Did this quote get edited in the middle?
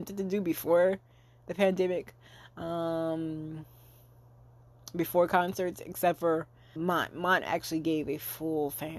yes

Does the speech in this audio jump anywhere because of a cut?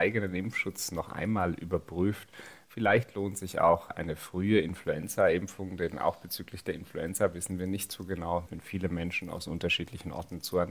yes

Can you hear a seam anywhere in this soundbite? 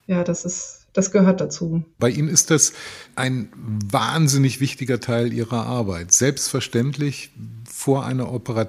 yes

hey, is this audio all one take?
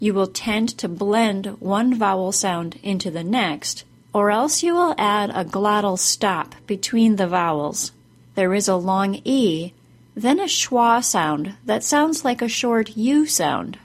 no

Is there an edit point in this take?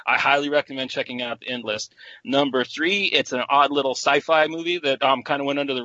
no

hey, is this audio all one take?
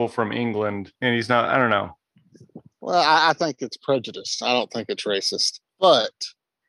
no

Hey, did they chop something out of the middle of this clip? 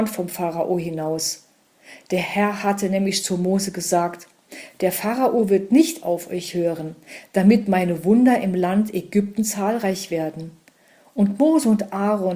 no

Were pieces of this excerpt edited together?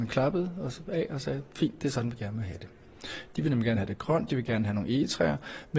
no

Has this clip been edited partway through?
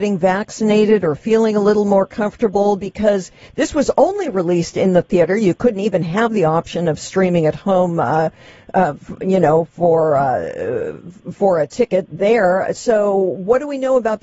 no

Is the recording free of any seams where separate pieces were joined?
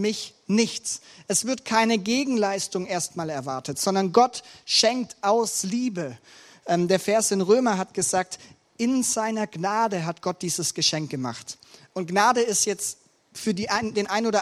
yes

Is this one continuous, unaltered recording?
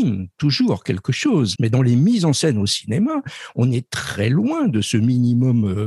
no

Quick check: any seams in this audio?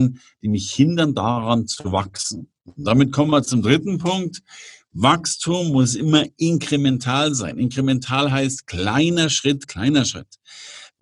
no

